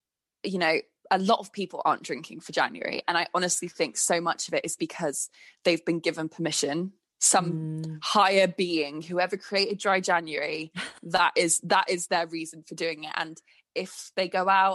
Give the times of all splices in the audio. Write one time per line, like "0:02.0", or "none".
0:01.0

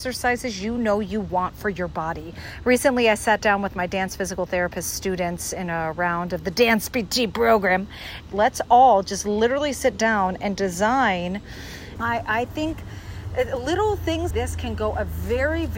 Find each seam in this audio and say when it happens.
0:08.3
0:12.0
0:14.3

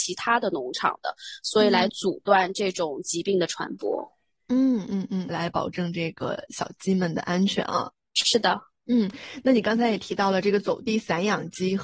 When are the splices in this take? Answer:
0:05.3

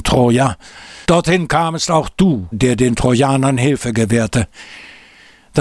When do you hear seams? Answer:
0:01.0
0:02.5

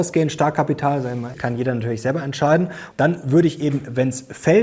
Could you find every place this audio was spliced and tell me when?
0:01.3
0:02.9

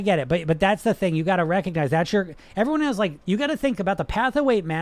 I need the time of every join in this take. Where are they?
0:03.2

